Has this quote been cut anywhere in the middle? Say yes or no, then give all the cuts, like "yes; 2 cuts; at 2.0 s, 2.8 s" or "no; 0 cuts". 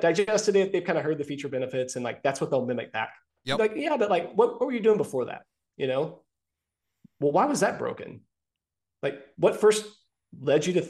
no; 0 cuts